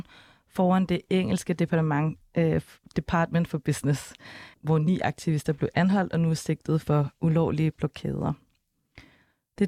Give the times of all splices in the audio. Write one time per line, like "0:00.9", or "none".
0:04.5